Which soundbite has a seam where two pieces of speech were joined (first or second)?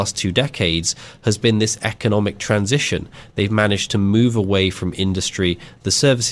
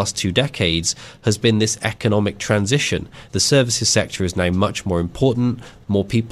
second